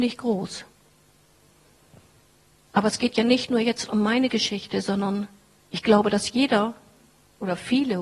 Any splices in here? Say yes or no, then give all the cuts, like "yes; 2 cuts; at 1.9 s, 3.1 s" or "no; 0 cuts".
no; 0 cuts